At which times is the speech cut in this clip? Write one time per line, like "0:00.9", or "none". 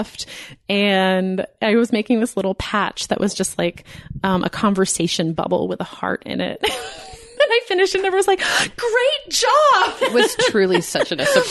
none